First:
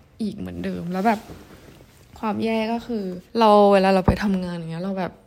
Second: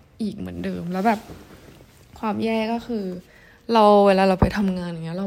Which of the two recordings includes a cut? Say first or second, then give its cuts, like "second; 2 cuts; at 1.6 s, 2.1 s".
first; 1 cut; at 3.3 s